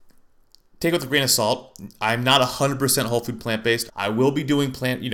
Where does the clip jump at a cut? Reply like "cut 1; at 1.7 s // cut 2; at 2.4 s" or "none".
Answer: cut 1; at 3.9 s